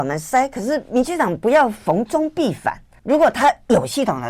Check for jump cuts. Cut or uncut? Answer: cut